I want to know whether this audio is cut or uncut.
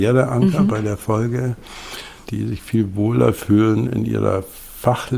cut